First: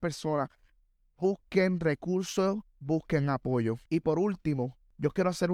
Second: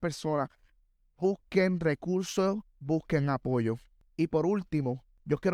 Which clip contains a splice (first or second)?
first